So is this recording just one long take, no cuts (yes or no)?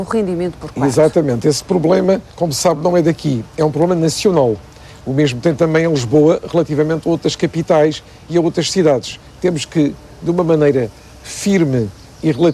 no